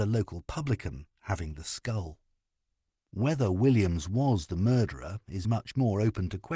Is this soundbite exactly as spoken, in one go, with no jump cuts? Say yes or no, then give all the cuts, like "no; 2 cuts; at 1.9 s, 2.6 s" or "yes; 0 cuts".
no; 1 cut; at 5.4 s